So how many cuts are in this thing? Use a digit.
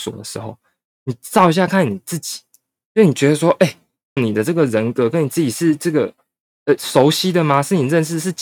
2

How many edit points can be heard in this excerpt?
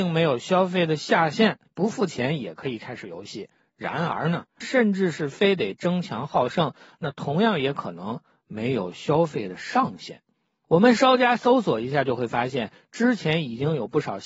1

